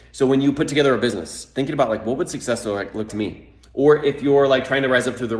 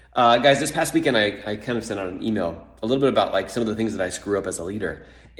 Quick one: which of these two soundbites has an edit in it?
first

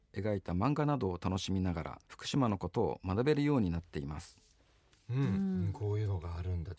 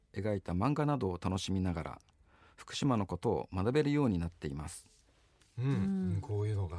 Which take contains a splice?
first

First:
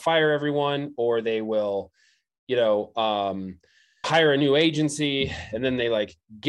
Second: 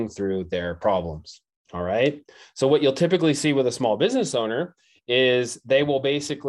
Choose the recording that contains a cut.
first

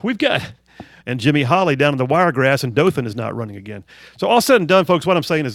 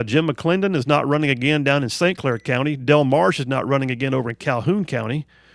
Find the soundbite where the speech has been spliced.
first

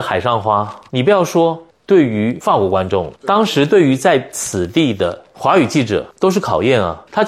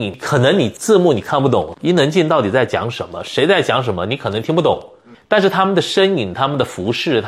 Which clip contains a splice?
second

